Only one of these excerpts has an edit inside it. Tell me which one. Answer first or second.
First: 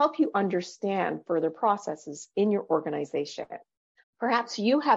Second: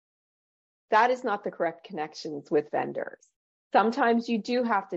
first